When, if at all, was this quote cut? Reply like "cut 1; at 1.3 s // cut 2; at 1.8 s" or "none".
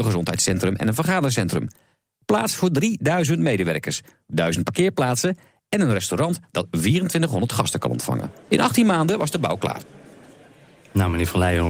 none